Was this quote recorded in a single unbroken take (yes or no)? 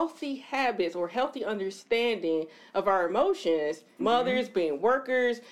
no